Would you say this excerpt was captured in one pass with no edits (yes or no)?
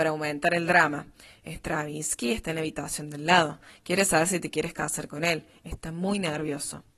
yes